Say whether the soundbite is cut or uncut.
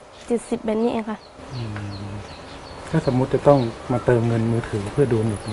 uncut